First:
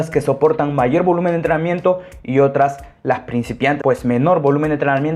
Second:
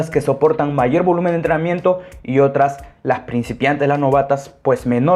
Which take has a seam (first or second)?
first